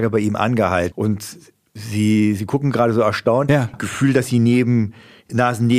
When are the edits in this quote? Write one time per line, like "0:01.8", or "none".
0:00.9
0:03.7